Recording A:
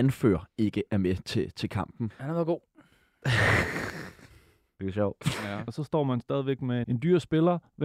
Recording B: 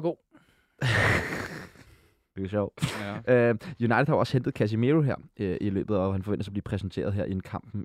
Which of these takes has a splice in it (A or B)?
A